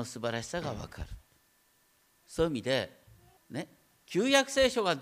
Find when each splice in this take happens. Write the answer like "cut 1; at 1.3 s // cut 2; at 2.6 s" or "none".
cut 1; at 3.4 s